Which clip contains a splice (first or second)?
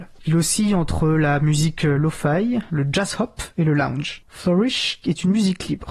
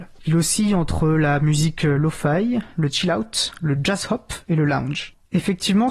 first